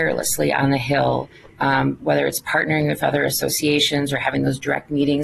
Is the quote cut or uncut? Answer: uncut